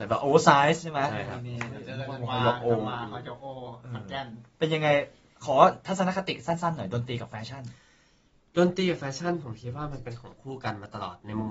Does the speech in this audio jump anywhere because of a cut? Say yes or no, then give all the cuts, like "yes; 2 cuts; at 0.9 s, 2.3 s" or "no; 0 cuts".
no; 0 cuts